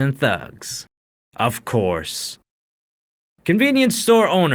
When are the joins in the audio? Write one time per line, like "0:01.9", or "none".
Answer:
none